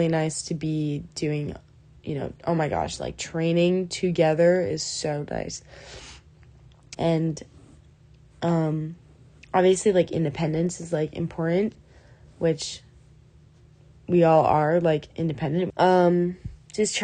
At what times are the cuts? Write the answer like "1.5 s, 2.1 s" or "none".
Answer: 6.9 s, 15.7 s